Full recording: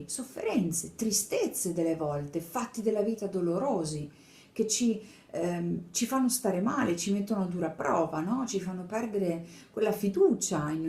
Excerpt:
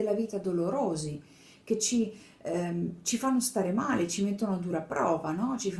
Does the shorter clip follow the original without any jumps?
yes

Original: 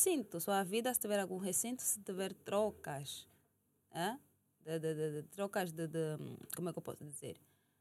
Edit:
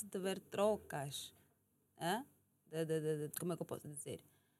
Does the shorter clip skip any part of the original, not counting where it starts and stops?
yes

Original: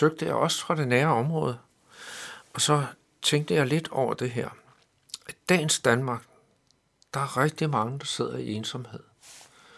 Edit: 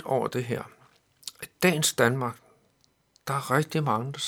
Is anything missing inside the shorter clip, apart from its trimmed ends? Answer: no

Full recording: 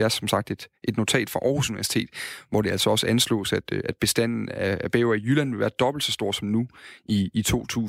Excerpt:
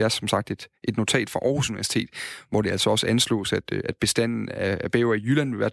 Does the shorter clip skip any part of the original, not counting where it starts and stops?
no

